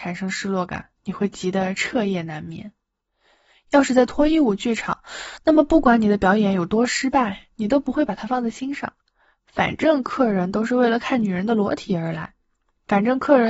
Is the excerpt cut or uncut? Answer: uncut